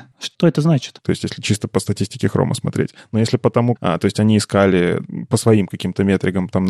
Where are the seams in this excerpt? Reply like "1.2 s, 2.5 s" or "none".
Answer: 1.0 s, 3.8 s